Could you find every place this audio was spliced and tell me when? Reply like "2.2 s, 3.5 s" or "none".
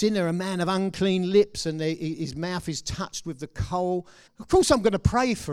4.3 s